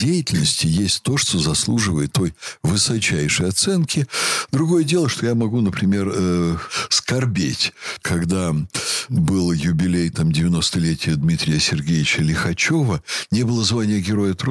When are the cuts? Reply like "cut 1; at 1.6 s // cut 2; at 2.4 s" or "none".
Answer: cut 1; at 2.1 s